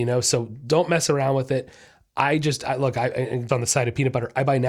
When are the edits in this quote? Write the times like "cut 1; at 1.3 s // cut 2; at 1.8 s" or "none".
cut 1; at 3.5 s